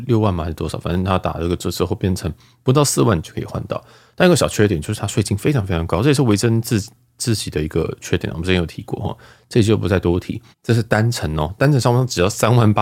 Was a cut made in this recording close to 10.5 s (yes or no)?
yes